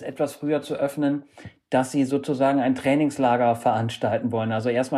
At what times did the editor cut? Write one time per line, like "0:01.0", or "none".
none